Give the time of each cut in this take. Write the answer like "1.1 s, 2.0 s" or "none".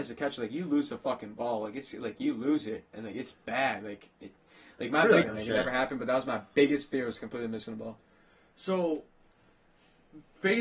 5.2 s